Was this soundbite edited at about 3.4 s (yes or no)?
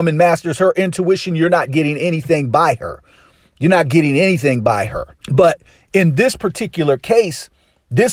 no